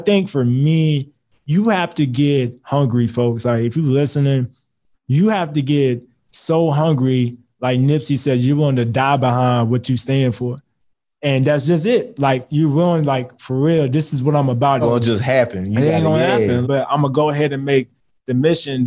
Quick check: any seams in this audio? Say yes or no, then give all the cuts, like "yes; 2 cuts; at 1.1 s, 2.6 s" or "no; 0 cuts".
yes; 2 cuts; at 14.8 s, 16.6 s